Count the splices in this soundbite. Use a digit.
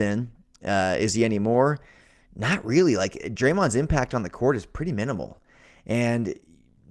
0